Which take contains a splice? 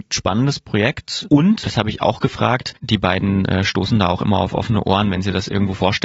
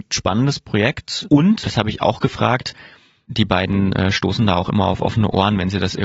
first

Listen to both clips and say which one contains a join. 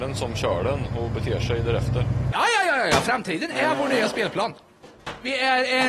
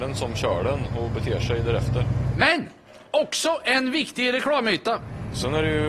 first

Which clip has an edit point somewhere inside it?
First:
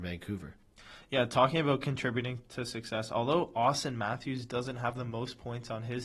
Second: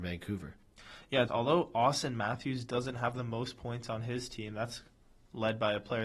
second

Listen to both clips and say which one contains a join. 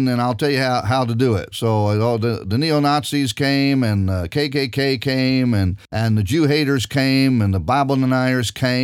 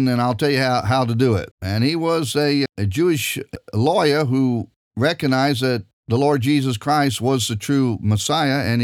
second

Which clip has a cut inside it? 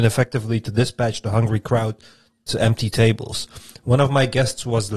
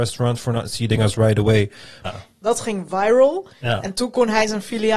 second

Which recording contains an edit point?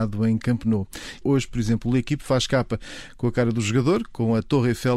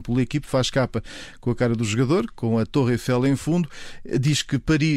first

